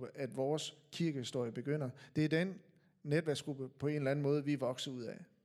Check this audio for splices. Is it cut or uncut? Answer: uncut